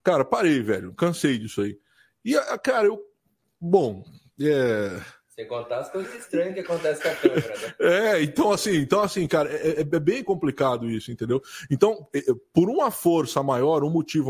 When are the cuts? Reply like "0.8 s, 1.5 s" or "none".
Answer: none